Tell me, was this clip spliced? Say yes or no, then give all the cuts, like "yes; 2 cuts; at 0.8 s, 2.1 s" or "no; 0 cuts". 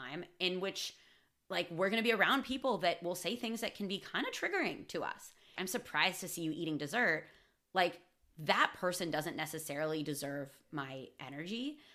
yes; 1 cut; at 5.6 s